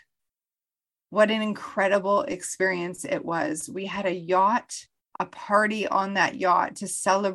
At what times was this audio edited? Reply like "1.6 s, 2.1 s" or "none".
5.0 s